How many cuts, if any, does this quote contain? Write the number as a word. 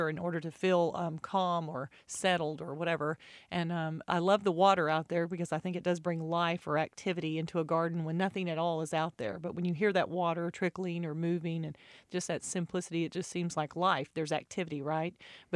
zero